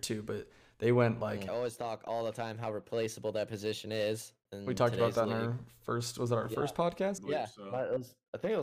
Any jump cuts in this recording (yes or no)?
yes